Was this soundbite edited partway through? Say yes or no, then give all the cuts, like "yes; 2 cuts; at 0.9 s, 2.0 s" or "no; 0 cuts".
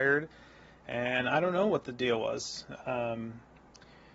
yes; 1 cut; at 2.8 s